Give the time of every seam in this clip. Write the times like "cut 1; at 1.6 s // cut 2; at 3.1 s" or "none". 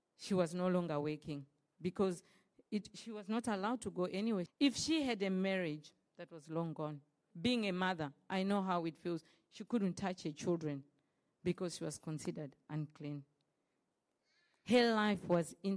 cut 1; at 4.5 s // cut 2; at 7.3 s